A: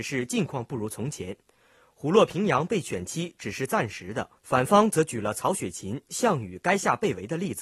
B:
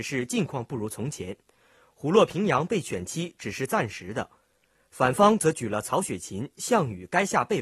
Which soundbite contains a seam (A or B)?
A